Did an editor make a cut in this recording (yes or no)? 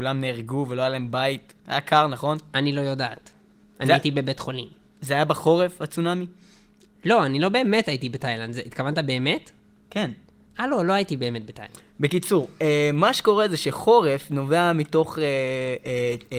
no